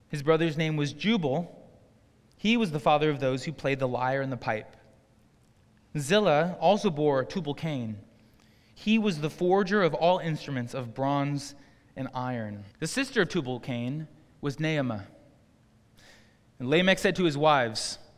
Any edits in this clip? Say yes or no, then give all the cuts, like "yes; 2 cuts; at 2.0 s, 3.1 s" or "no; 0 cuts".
yes; 1 cut; at 12.7 s